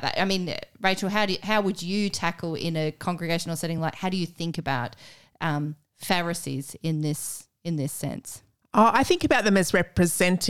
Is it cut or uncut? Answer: uncut